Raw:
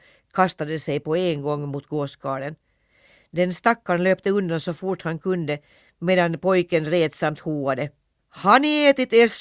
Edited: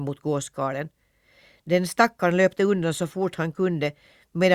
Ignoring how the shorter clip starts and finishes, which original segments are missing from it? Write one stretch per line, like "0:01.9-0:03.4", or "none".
none